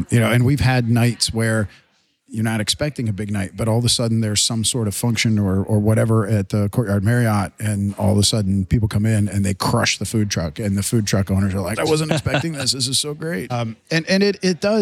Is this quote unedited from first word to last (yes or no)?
no